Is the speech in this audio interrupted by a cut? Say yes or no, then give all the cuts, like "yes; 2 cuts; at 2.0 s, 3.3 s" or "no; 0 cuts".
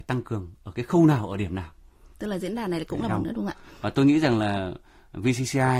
yes; 1 cut; at 3.1 s